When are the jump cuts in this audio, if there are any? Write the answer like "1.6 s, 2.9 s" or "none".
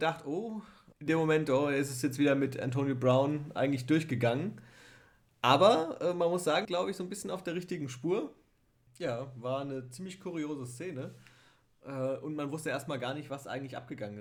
0.9 s, 6.7 s, 8.9 s